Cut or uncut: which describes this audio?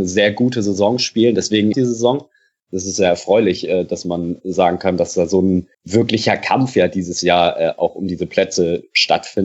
cut